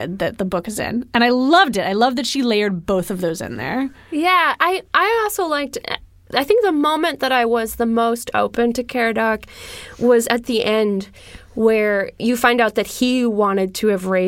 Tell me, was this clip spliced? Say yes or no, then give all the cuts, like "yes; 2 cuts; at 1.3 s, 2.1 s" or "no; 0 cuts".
no; 0 cuts